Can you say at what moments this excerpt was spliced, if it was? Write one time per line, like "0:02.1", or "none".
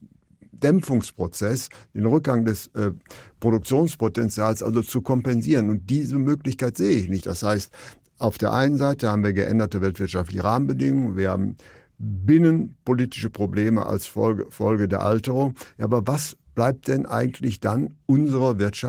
0:07.2